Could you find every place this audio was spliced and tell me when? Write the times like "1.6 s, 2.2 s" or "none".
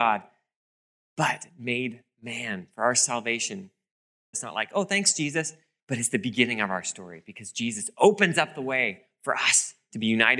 4.3 s, 5.8 s